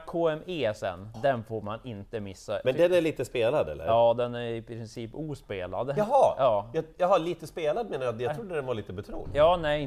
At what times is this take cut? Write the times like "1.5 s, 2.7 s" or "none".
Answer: 1.1 s